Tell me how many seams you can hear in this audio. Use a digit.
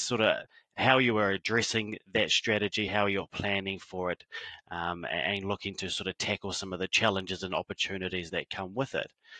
0